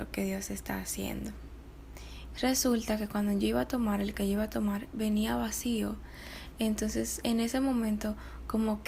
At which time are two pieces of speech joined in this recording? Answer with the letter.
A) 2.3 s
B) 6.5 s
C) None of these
A